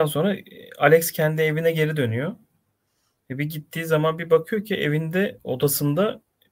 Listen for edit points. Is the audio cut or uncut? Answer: uncut